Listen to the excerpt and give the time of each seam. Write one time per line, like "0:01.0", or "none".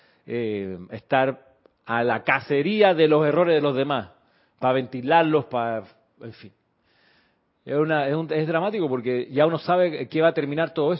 none